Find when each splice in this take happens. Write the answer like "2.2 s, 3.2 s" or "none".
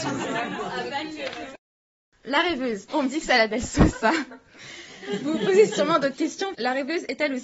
2.9 s, 6.5 s